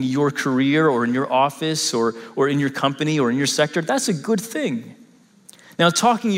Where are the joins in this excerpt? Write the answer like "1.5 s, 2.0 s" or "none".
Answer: none